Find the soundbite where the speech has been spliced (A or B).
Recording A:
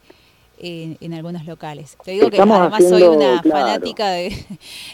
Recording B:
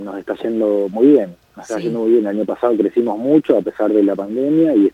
A